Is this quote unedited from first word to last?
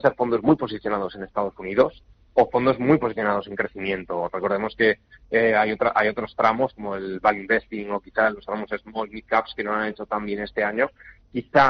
yes; 0 cuts

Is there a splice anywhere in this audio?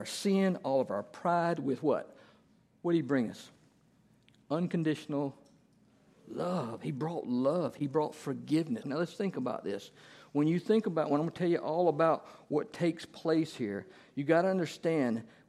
yes; 1 cut; at 8.8 s

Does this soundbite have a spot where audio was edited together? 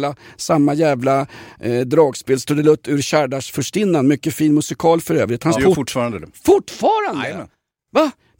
yes; 1 cut; at 5.6 s

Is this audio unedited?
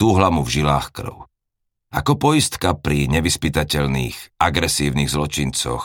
no; 1 cut; at 1.8 s

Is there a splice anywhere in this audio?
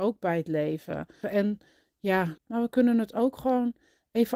yes; 2 cuts; at 1.2 s, 2.4 s

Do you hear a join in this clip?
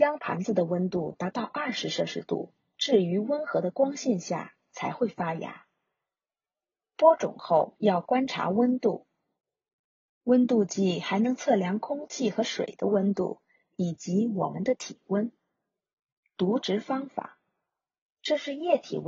no; 0 cuts

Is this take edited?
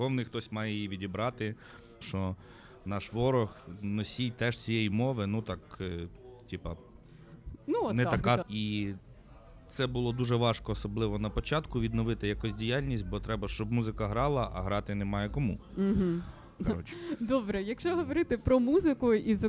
yes; 3 cuts; at 2.0 s, 8.4 s, 16.6 s

